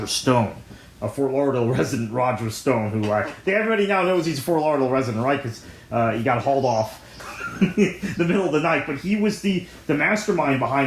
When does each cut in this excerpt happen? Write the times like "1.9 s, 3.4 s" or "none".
none